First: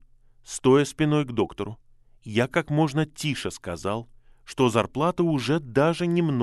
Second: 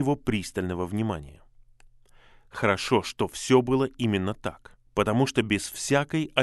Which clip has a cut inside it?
second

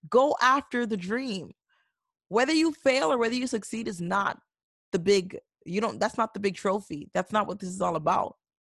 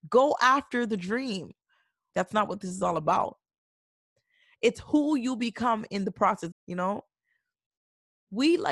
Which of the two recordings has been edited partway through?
second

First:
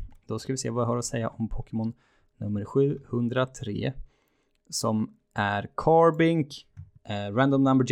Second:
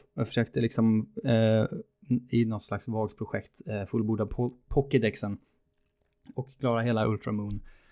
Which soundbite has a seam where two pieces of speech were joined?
first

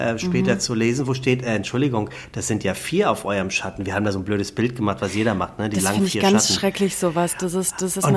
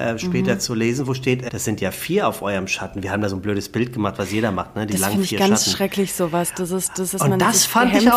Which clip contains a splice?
second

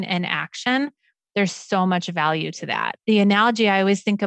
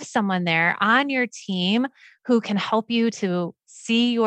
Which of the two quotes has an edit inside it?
first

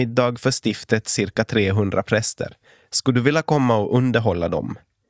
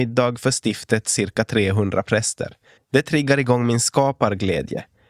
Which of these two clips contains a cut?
second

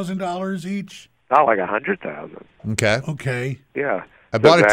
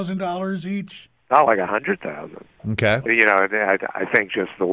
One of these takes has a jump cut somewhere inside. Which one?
second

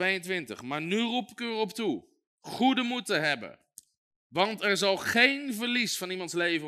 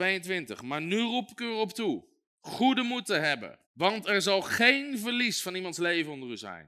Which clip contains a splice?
second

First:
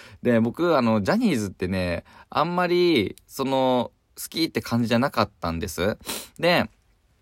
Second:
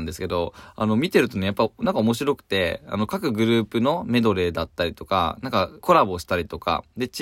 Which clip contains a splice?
second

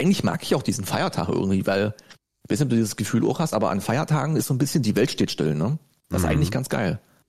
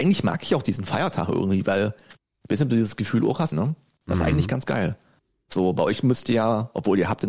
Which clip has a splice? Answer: second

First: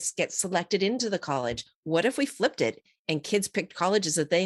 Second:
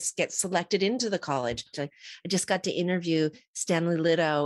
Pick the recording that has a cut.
second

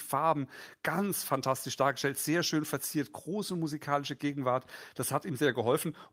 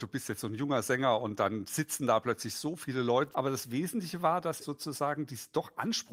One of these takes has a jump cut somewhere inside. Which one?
second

